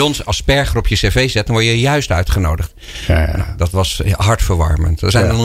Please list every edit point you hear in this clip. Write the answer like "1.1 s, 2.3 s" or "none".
none